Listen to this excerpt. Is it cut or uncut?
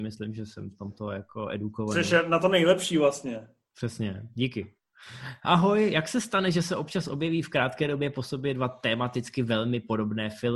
cut